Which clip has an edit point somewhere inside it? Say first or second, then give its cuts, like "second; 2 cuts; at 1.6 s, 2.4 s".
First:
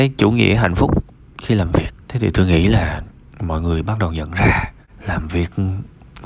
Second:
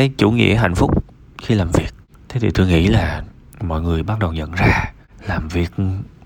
first; 1 cut; at 2.0 s